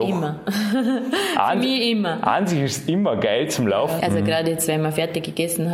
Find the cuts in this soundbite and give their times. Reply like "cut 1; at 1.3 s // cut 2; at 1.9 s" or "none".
cut 1; at 4.0 s